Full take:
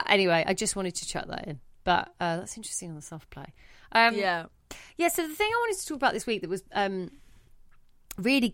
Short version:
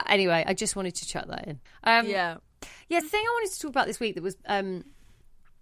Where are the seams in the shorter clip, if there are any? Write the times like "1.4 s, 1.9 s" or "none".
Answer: 1.7 s, 3.0 s

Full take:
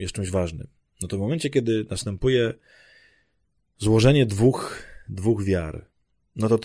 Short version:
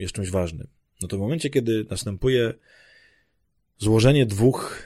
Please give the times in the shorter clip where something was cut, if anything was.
none

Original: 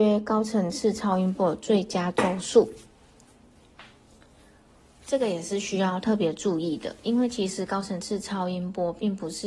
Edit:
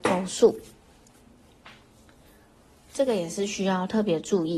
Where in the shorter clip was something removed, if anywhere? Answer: none

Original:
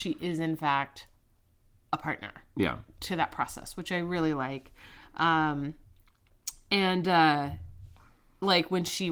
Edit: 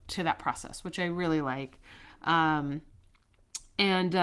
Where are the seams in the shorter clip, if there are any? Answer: none

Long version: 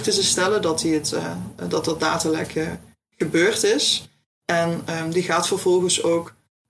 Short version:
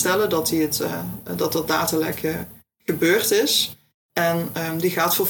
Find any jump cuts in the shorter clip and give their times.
none

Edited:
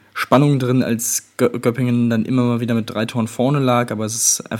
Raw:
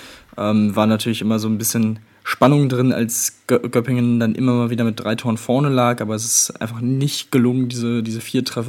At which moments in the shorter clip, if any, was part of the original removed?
none

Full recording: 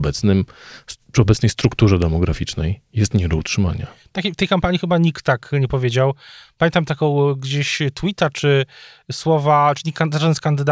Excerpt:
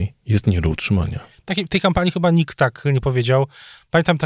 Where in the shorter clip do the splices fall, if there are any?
none

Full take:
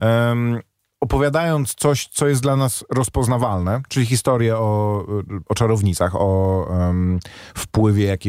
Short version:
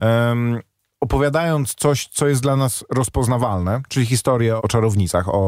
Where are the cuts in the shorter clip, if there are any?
4.6 s

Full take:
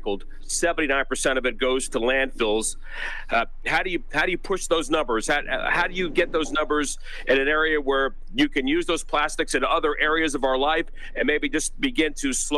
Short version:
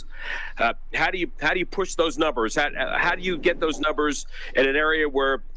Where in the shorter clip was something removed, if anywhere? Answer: none

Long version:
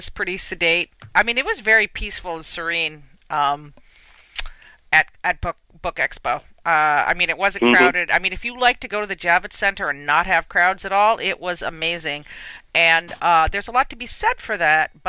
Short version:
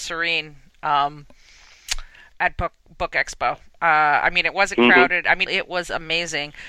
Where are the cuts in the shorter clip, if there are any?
2.3 s, 5.5 s

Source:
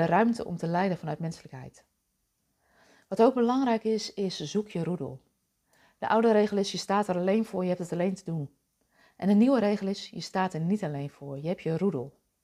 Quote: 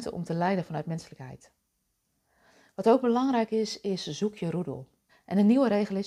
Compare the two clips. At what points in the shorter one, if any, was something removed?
5.1 s

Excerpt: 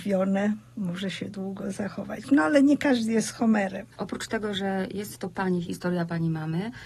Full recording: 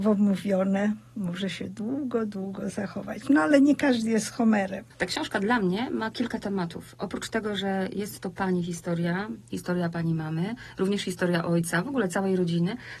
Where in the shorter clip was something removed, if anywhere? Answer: 1.3 s, 4.0 s, 5.6 s

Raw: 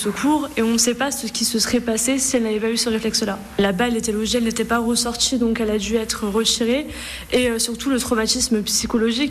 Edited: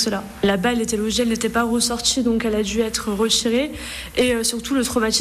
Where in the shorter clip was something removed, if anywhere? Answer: none

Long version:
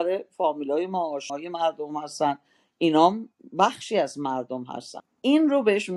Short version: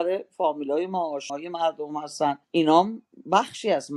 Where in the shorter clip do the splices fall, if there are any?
2.4 s

